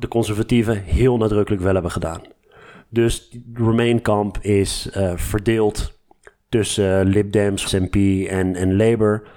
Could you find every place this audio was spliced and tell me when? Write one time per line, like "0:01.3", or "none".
0:07.7